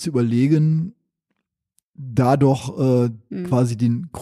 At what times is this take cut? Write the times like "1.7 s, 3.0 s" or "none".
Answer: none